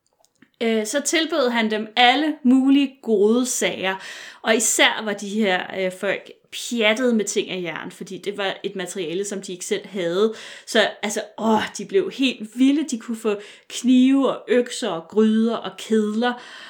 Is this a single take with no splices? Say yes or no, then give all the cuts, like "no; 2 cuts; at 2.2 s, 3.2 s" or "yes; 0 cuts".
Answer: yes; 0 cuts